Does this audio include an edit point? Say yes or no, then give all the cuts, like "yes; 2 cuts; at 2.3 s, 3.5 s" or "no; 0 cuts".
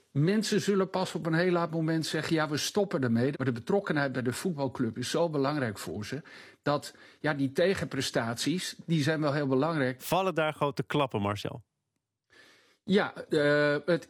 yes; 2 cuts; at 3.3 s, 10.0 s